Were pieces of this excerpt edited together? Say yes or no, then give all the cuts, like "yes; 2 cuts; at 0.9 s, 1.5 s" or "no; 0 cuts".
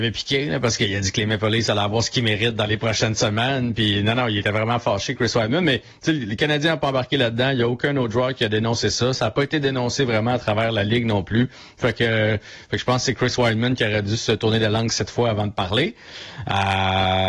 no; 0 cuts